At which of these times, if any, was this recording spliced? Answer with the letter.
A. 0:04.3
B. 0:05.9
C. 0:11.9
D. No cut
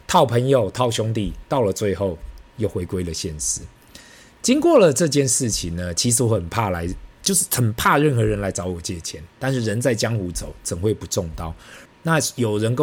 C